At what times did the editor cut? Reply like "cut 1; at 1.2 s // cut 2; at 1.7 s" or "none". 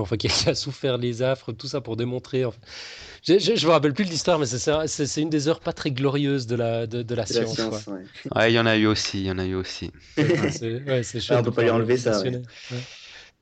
cut 1; at 8.3 s // cut 2; at 10.2 s